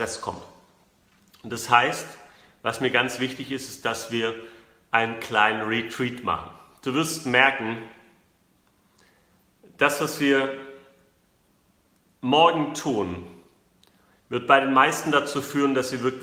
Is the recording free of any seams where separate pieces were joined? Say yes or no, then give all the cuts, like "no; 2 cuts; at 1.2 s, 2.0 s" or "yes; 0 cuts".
yes; 0 cuts